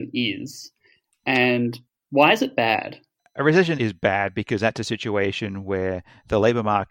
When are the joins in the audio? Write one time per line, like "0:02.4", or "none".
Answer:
0:03.8